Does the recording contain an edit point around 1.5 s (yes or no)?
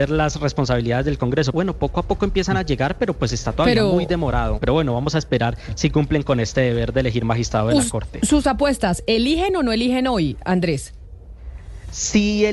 yes